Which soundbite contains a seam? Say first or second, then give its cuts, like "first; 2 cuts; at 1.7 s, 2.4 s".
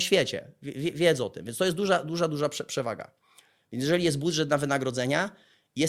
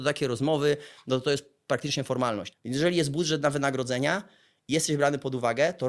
second; 1 cut; at 2.5 s